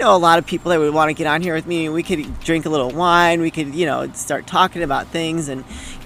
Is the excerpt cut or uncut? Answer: uncut